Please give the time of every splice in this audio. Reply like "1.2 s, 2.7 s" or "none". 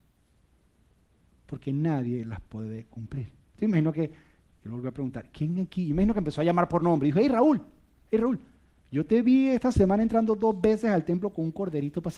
none